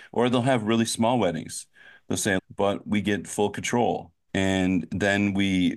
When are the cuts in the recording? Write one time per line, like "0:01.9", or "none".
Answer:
0:02.4
0:04.3